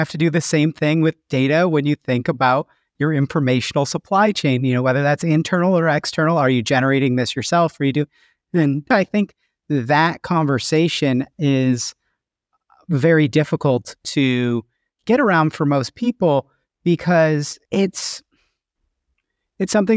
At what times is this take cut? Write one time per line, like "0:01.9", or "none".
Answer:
0:17.6